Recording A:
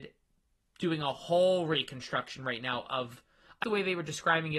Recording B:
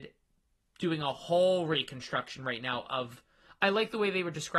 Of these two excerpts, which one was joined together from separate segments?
A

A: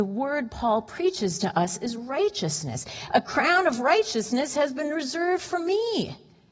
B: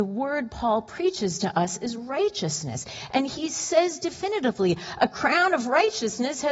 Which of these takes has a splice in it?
A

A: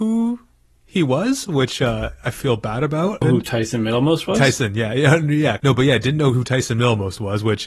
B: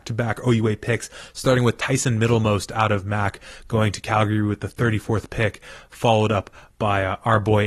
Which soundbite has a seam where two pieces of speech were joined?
A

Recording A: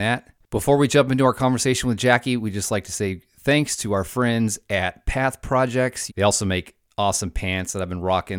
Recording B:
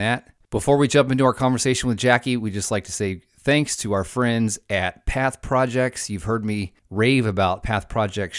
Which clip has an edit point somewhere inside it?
A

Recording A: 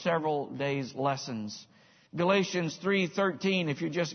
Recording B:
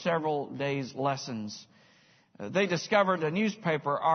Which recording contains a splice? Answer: A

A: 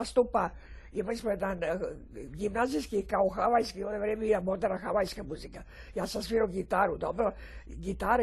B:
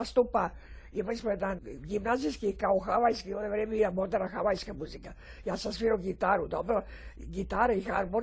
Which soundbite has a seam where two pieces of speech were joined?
B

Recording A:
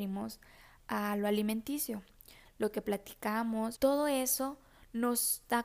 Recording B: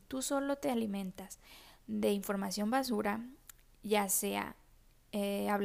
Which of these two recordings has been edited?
A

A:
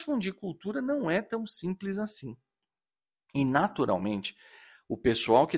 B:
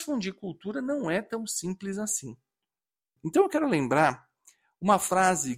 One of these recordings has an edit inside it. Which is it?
B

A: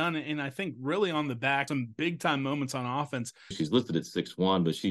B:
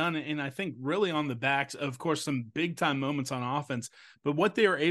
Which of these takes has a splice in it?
A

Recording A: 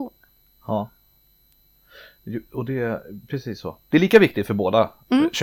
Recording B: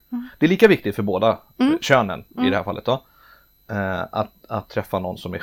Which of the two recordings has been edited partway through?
A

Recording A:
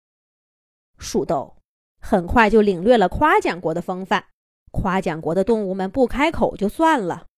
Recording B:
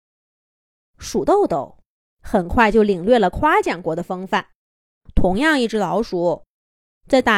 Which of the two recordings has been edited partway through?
A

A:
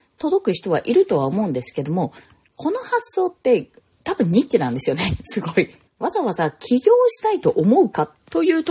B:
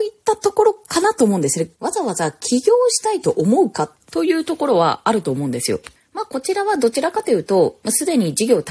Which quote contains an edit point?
B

